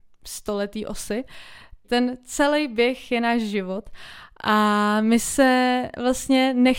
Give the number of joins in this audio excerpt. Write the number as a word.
one